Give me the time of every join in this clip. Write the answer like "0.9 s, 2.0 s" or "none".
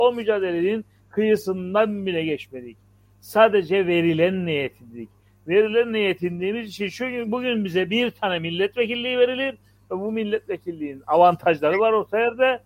none

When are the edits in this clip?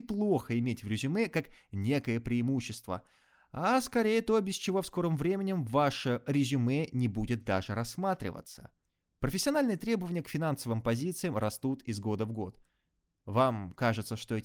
none

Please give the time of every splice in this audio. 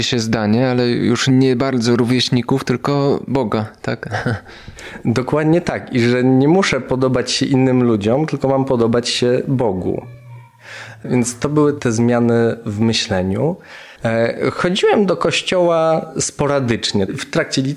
14.0 s

